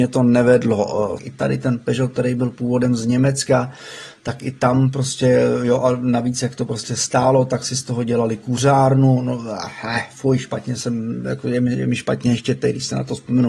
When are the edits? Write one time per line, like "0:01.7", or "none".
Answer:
0:01.2

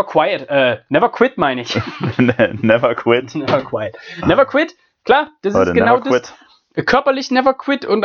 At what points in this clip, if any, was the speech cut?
none

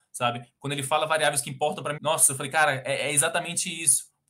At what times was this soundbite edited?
0:02.0

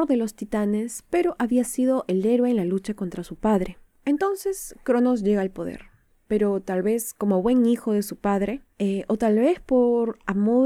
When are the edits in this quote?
none

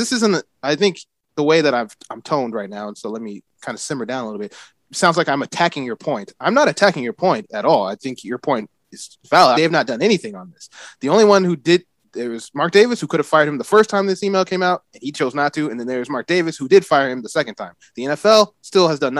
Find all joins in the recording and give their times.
0:09.5

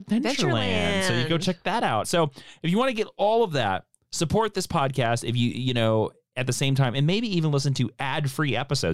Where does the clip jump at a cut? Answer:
0:02.0

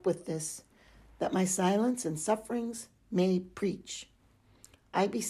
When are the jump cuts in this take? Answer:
none

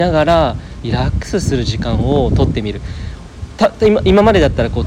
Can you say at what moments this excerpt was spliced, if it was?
none

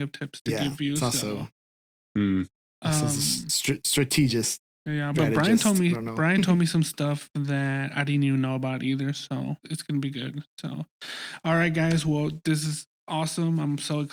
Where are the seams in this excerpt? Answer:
0:05.1
0:09.6

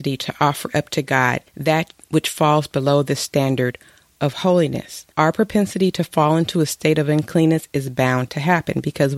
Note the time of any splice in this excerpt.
0:01.5
0:05.1

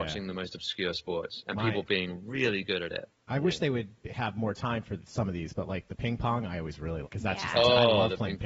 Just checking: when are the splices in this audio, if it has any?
0:07.0

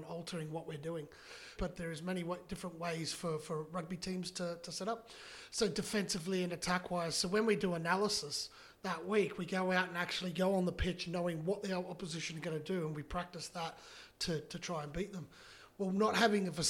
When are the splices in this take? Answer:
0:01.6

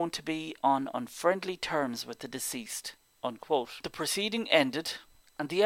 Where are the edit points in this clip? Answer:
0:03.0

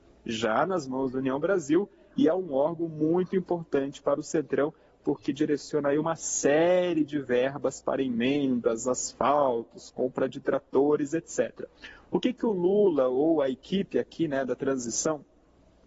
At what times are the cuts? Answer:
none

